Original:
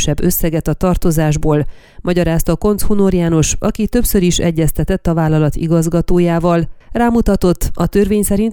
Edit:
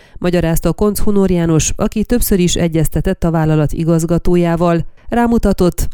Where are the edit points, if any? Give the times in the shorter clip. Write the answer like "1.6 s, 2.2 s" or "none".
none